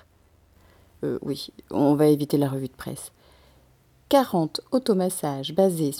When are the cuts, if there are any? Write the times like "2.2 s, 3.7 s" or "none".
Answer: 1.0 s